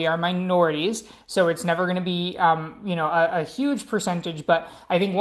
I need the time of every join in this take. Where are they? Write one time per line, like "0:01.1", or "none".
none